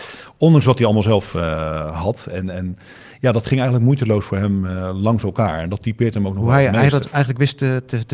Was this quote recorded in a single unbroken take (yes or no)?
yes